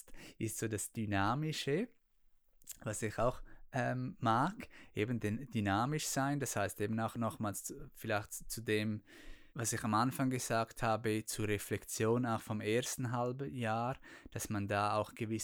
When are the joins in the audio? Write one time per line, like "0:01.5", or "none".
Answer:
0:09.5